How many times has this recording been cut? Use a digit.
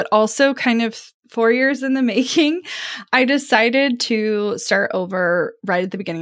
0